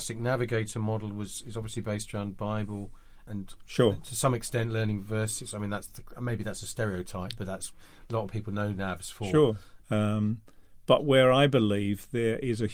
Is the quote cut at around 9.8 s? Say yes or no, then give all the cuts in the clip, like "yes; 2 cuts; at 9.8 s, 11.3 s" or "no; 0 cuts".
yes; 2 cuts; at 3.3 s, 9.8 s